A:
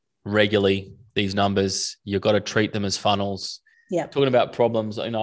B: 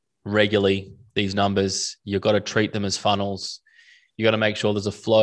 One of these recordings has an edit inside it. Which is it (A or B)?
A